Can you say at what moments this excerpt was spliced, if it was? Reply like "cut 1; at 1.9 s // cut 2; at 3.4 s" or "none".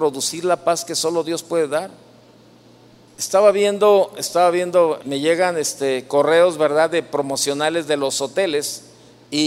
cut 1; at 3.1 s // cut 2; at 5.0 s